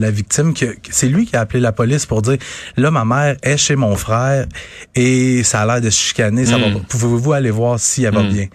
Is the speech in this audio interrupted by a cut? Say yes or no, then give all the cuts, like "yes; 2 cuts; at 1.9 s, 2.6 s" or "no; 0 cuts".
no; 0 cuts